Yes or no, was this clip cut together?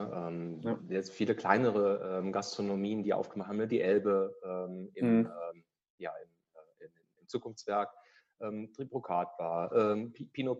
yes